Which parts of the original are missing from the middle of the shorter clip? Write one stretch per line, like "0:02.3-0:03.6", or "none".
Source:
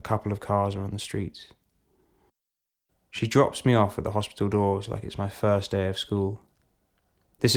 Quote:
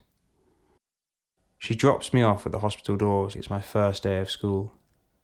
0:04.9-0:05.0

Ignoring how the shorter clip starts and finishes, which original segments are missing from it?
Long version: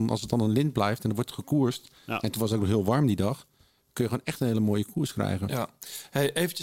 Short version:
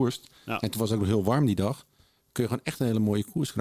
none

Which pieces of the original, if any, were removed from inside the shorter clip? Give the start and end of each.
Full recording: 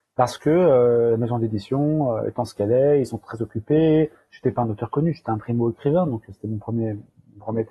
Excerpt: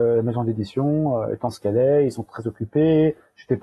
none

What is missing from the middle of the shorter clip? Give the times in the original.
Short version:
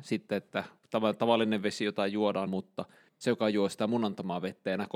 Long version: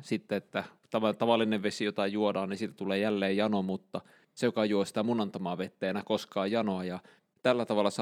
0:02.5-0:03.6

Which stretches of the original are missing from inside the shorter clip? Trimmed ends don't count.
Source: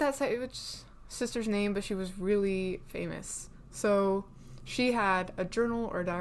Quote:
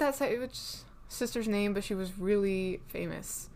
none

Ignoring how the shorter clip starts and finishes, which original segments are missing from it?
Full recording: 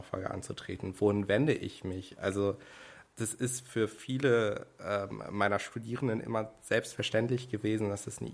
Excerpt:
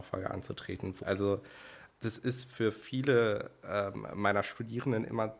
0:01.0-0:02.2

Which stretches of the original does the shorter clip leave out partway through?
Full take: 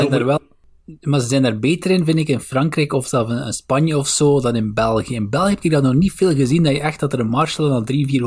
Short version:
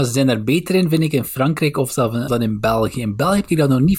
0:03.4-0:04.4

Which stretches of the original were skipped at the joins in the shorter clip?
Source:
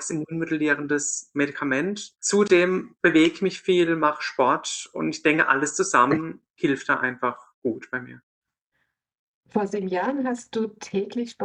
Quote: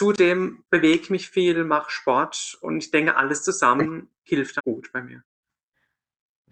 0:06.9-0:07.5

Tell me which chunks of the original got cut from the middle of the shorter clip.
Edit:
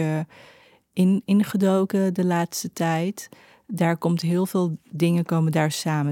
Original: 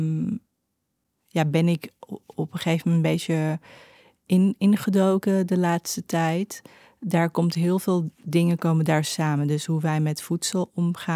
none

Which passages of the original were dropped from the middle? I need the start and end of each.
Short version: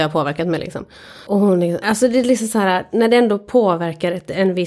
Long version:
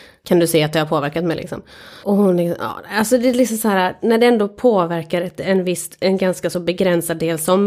0:02.6-0:02.9

